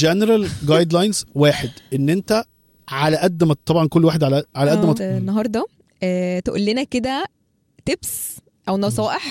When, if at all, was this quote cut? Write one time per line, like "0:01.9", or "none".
0:05.0